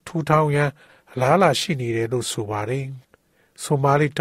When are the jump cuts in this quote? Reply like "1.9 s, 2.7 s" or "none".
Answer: 3.0 s